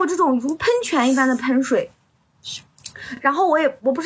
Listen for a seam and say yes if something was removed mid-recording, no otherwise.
no